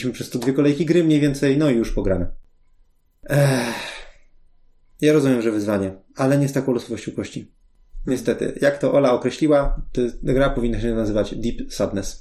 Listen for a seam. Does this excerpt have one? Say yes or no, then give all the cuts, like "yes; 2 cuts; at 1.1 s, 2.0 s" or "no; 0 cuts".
no; 0 cuts